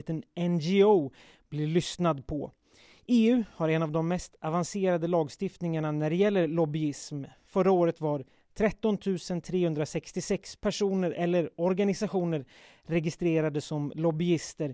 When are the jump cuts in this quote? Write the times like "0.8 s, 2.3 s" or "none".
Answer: none

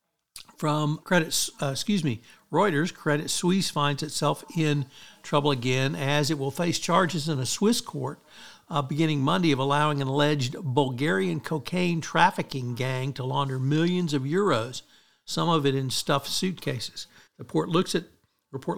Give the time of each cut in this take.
1.0 s, 17.3 s

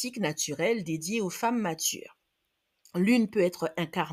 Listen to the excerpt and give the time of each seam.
none

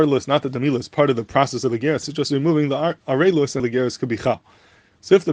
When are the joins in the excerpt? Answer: 2.0 s, 3.6 s

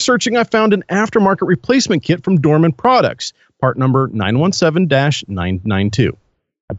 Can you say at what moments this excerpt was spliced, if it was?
none

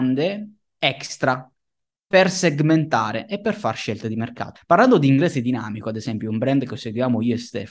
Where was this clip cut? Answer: 4.6 s

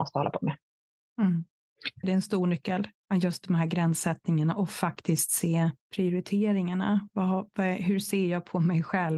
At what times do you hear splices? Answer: 2.0 s, 5.8 s

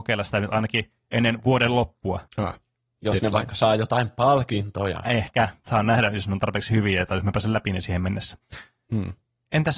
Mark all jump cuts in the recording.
2.3 s

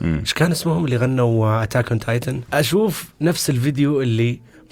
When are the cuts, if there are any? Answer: 2.5 s

